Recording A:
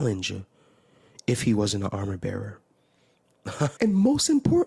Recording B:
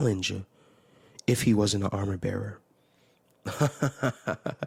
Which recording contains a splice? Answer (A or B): A